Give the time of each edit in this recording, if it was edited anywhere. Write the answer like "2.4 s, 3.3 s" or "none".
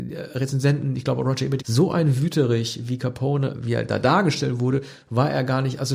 1.6 s, 3.5 s